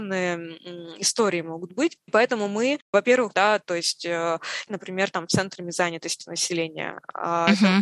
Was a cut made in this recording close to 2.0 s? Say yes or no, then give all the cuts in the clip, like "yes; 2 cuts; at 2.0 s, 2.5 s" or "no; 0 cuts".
no; 2 cuts; at 3.3 s, 4.7 s